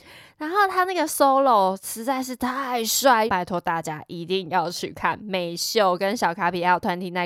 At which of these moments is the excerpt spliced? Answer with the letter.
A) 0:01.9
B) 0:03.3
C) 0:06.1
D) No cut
B